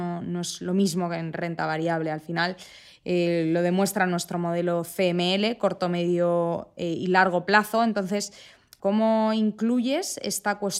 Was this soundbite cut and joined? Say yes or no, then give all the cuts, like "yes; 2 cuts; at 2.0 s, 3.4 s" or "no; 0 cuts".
yes; 1 cut; at 8.8 s